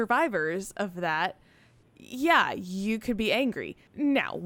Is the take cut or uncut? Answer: uncut